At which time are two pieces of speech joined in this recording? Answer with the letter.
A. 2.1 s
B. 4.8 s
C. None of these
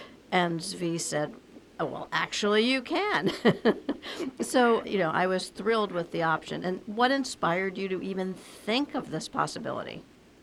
B